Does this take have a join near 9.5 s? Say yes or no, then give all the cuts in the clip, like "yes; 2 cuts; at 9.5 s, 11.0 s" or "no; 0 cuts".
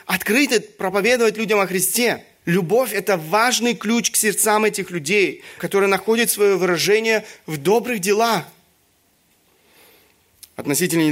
no; 2 cuts; at 2.4 s, 5.6 s